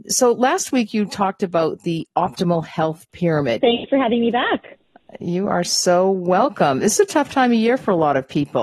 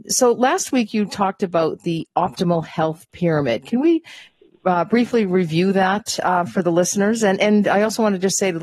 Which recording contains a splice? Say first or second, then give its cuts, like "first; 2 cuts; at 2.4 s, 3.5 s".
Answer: first; 1 cut; at 3.6 s